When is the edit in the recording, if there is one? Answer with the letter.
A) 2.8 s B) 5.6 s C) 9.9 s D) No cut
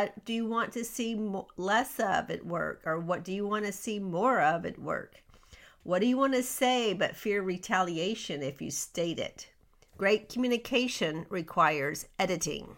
C